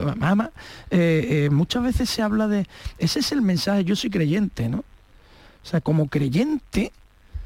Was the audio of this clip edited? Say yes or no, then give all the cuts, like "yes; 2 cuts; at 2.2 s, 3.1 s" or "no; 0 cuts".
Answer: no; 0 cuts